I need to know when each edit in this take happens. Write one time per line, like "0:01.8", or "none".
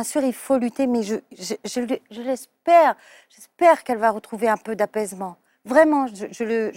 none